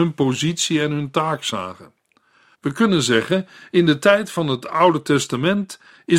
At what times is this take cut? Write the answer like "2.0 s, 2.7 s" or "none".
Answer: 2.5 s